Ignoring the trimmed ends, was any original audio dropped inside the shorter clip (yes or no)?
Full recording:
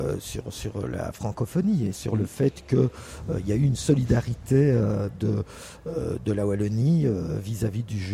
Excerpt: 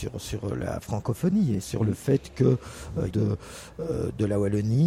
yes